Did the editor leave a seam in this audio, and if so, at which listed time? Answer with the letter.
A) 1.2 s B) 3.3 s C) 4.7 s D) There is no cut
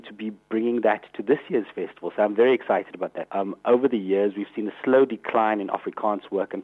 B